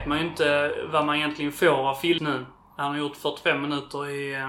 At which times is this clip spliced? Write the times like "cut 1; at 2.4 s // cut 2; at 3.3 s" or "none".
cut 1; at 2.2 s